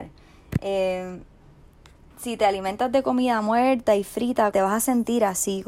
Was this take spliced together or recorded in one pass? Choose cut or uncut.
cut